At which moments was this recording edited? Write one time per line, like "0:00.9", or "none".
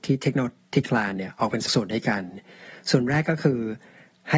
0:01.7